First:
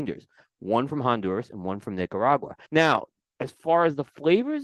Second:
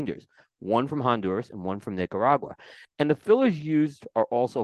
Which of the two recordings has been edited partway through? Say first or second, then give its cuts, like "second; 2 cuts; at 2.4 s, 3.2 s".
first; 1 cut; at 2.7 s